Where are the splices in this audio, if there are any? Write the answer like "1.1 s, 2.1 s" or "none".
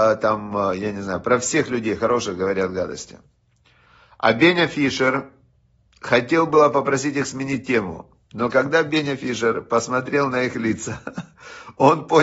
none